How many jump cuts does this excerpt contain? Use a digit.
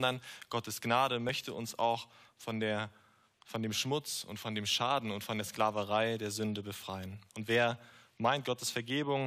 1